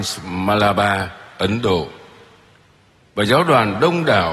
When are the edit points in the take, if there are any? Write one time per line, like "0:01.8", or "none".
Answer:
none